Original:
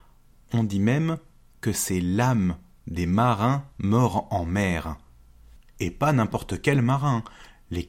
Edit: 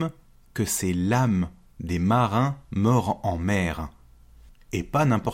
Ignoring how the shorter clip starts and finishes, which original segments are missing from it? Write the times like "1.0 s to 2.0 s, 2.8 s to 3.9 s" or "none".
none